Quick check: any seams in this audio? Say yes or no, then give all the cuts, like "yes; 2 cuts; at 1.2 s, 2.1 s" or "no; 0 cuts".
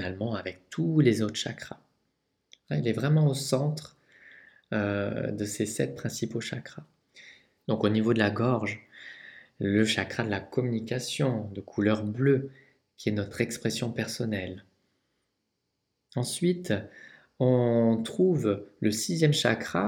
yes; 1 cut; at 7.6 s